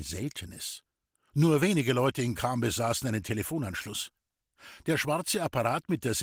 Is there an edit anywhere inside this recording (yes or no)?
no